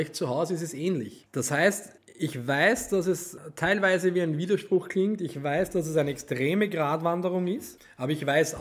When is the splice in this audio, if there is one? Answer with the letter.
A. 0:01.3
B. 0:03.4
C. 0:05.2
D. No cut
A